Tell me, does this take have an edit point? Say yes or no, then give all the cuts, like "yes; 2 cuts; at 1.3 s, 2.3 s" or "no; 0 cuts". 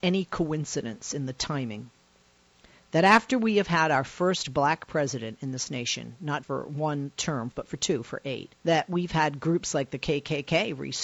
yes; 3 cuts; at 6.4 s, 7.5 s, 8.6 s